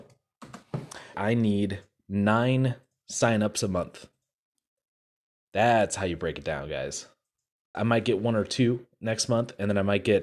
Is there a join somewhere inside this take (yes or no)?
yes